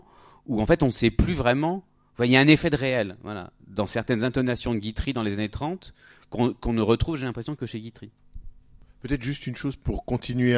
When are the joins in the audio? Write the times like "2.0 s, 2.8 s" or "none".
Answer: none